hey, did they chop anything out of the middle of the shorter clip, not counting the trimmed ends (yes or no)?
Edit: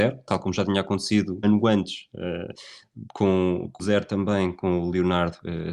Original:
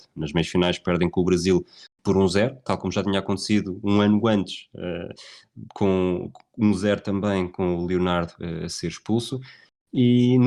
yes